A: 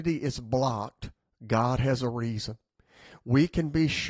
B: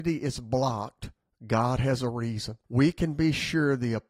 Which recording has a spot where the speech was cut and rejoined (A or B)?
B